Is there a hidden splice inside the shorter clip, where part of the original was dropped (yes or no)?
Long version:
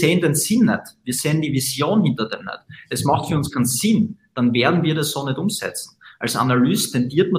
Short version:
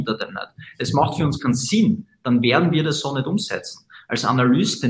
no